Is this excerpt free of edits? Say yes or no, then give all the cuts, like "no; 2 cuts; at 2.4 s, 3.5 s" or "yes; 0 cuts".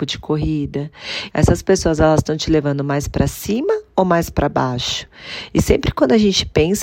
no; 1 cut; at 1.3 s